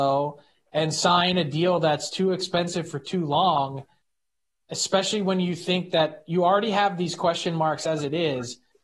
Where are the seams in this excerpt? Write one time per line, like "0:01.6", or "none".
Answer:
none